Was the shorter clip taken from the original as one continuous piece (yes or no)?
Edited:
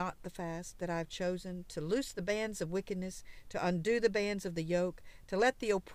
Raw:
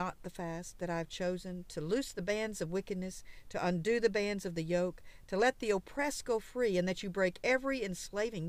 yes